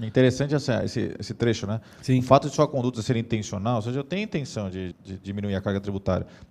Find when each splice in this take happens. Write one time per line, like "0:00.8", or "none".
0:04.9